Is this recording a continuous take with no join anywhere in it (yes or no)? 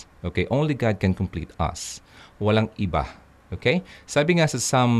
yes